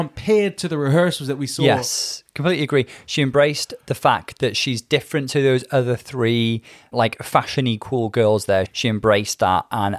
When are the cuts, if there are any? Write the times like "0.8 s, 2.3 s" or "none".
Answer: 6.9 s, 8.7 s